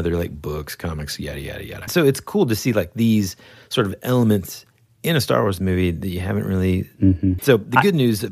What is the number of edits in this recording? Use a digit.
2